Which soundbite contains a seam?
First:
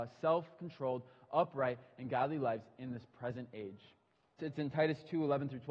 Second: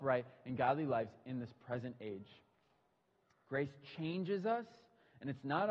first; 1 cut; at 4.4 s

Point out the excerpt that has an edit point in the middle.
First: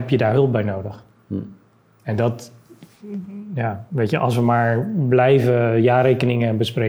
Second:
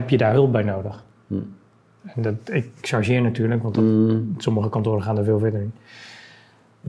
second; 1 cut; at 2.0 s

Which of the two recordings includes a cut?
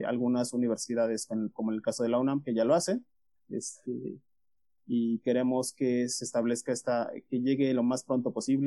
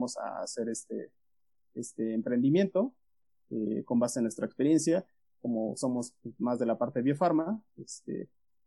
first; 1 cut; at 3.4 s

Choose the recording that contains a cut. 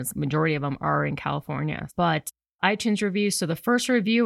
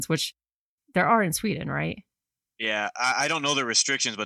first; 1 cut; at 1.9 s

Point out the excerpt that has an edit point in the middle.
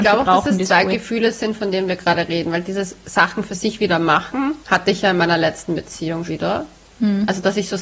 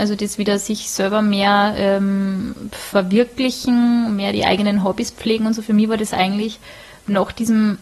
first; 2 cuts; at 4.6 s, 6.3 s

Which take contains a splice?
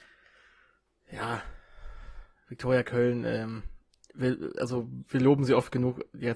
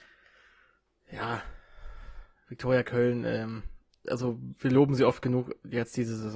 second; 1 cut; at 4.0 s

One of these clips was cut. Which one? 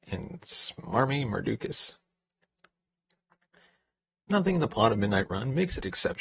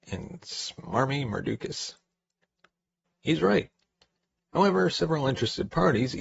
second; 1 cut; at 3.1 s

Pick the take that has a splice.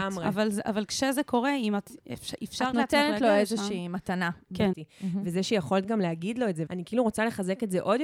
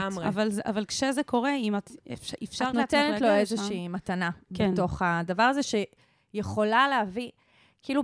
first; 2 cuts; at 4.7 s, 6.7 s

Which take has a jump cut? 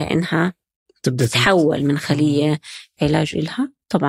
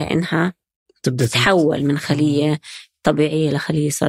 first; 1 cut; at 3.0 s

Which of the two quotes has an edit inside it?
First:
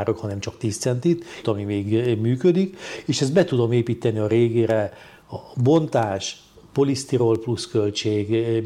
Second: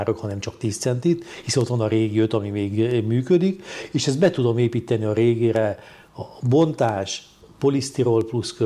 first; 1 cut; at 1.4 s

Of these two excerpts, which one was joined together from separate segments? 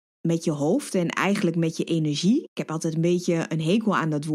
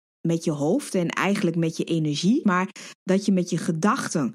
second; 1 cut; at 2.4 s

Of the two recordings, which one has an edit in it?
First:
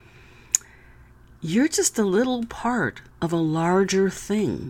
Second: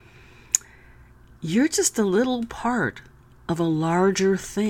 first; 1 cut; at 3.1 s

